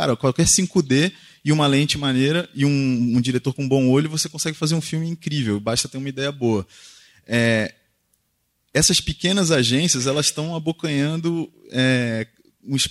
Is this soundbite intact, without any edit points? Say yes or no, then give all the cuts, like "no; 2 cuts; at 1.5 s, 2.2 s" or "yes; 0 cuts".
yes; 0 cuts